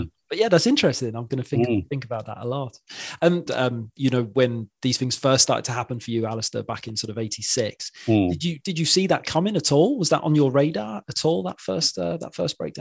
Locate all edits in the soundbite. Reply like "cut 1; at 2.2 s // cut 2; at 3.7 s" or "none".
cut 1; at 3.5 s